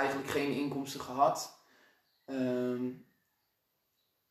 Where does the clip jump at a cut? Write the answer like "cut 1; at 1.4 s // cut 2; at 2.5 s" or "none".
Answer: none